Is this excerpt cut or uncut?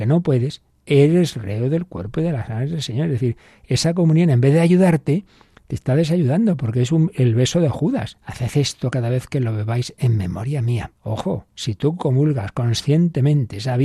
cut